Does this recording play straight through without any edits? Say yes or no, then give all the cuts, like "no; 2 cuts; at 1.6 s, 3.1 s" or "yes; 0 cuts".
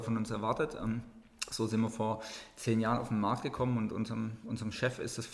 yes; 0 cuts